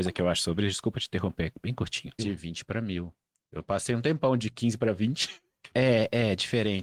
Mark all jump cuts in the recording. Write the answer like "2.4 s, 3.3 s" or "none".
2.2 s, 5.7 s